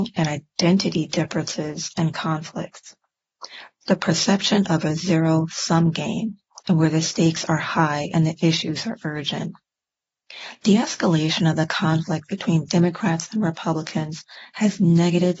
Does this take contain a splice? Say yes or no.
yes